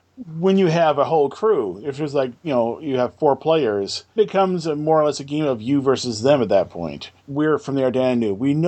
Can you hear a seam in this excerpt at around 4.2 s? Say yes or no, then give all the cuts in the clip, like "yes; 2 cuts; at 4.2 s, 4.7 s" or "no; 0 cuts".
yes; 2 cuts; at 4.2 s, 7.2 s